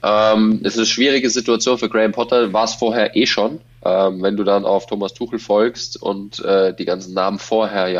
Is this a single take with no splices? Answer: yes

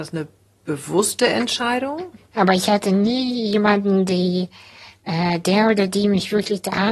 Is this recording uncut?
no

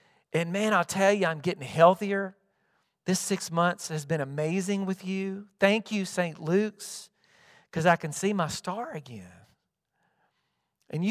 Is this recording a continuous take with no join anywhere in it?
yes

